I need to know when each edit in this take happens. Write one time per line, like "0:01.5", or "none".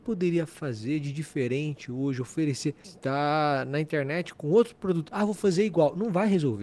0:02.8